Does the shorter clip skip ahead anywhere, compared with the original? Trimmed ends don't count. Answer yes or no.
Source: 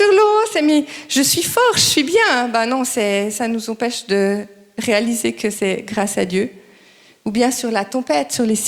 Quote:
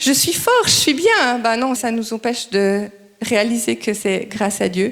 yes